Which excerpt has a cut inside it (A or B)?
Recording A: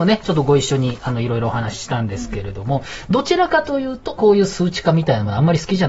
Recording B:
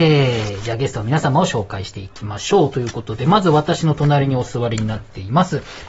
A